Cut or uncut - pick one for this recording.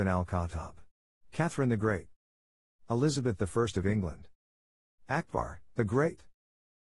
cut